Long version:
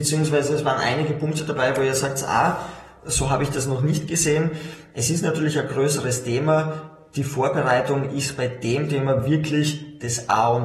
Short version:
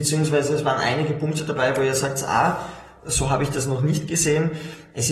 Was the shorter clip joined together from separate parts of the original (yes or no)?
no